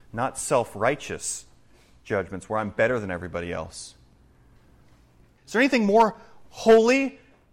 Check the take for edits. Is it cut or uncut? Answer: cut